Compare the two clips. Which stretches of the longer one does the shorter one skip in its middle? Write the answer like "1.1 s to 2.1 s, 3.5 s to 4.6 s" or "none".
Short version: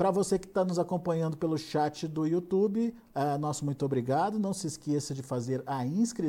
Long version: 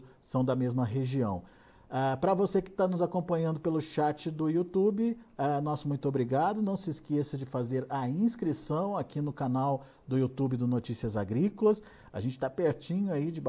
none